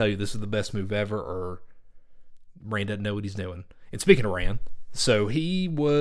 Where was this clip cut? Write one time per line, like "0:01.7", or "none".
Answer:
none